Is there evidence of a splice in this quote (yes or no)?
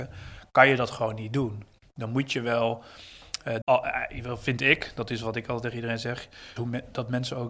yes